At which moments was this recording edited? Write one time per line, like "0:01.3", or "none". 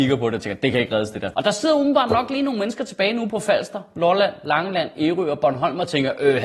0:01.3